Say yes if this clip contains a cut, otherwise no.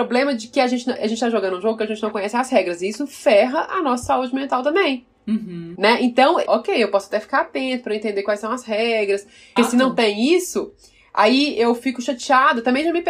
yes